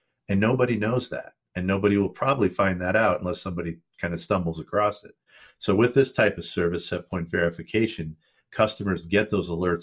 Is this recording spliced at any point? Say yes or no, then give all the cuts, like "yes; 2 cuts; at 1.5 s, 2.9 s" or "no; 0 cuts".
no; 0 cuts